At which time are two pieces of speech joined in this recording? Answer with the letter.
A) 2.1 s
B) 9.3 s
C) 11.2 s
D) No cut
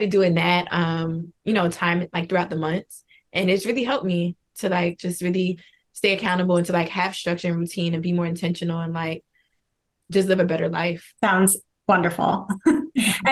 C